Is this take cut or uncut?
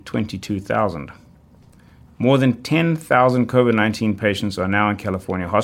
cut